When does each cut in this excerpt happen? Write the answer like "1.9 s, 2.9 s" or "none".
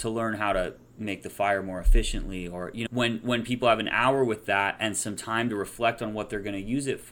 2.9 s